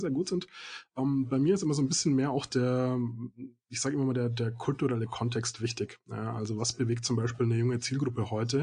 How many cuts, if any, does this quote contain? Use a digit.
0